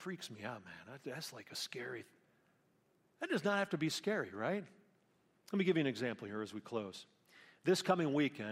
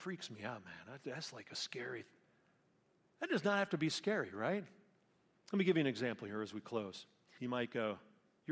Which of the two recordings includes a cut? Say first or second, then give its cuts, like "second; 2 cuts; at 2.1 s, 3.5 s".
second; 1 cut; at 7.4 s